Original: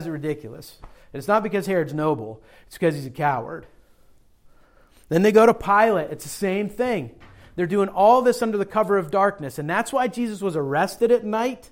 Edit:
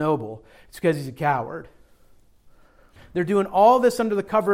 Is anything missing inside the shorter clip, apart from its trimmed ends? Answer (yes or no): yes